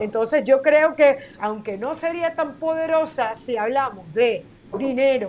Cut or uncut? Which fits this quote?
cut